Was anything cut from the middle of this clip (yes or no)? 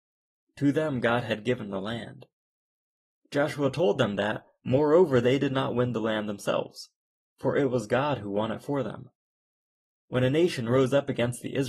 no